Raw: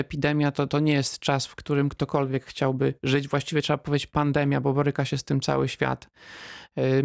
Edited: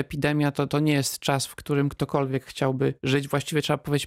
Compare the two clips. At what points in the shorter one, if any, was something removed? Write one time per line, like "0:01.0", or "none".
none